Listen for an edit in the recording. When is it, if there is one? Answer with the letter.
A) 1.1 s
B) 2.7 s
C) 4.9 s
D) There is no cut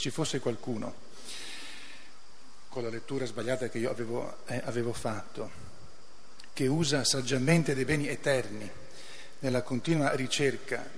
D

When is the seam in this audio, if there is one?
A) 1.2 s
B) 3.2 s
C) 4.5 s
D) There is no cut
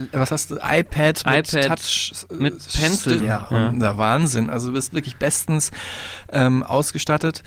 B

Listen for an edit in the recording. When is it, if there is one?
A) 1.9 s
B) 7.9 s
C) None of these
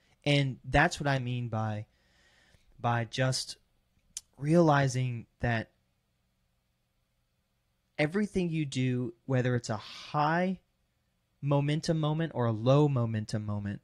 C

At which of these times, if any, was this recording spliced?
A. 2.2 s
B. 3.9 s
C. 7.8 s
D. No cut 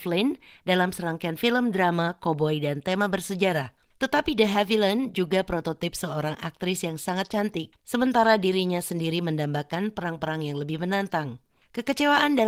C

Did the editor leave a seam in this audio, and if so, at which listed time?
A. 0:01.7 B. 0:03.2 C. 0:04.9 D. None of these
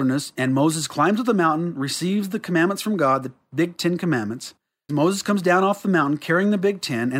C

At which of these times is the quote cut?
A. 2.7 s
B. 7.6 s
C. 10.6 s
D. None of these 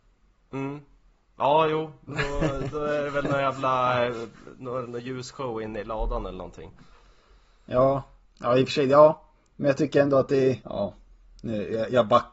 C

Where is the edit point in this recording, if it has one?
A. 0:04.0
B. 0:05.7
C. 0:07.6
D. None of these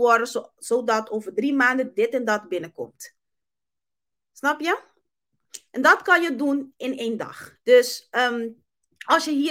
C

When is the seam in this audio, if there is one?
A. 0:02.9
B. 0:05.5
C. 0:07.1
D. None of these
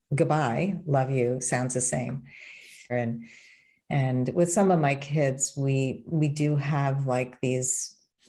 A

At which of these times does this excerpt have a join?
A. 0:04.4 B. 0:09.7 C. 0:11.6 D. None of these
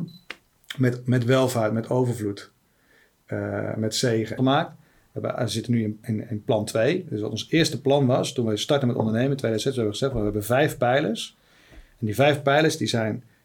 A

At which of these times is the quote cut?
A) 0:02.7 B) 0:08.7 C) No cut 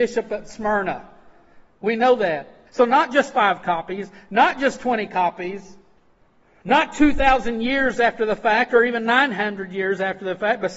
A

